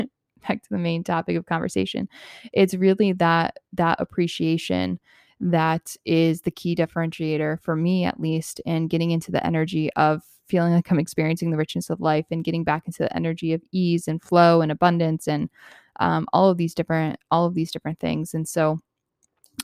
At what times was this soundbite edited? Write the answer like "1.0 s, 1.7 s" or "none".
none